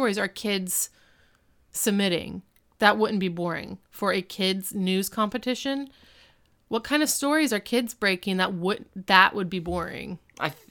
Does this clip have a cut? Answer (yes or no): no